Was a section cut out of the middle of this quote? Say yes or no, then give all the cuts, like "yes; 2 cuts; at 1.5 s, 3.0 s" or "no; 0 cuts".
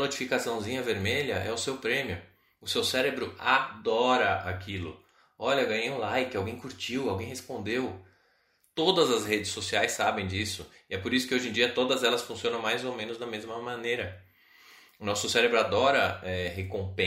no; 0 cuts